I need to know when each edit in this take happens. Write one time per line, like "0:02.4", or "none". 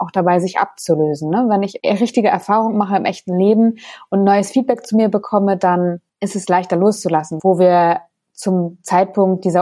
0:06.1
0:07.4